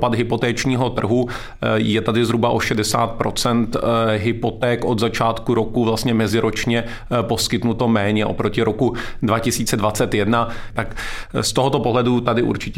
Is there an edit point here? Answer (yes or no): yes